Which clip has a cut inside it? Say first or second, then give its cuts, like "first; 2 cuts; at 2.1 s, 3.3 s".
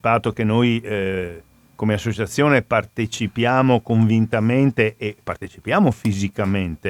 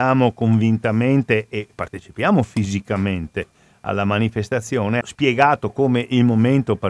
second; 1 cut; at 5.0 s